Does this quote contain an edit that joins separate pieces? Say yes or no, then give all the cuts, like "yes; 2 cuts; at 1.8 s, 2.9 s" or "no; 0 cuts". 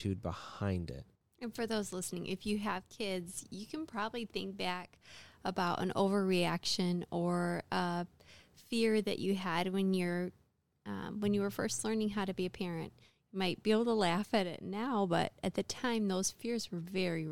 no; 0 cuts